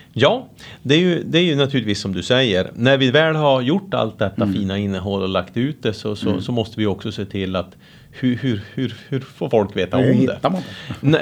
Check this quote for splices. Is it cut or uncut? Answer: uncut